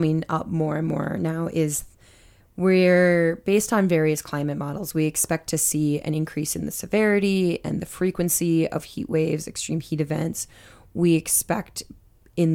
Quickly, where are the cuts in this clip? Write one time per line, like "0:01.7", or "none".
none